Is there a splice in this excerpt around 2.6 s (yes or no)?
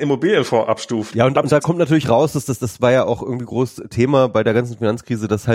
no